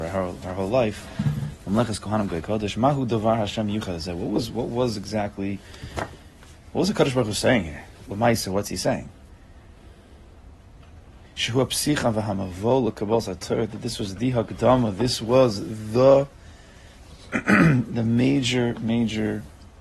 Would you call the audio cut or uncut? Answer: cut